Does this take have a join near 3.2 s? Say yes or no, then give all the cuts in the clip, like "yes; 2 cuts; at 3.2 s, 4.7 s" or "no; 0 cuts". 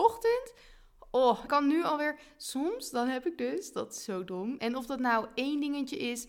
no; 2 cuts; at 1.5 s, 4.6 s